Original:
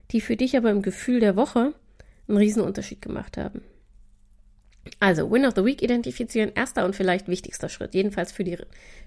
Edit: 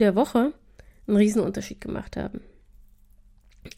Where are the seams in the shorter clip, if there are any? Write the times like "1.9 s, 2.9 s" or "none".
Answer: none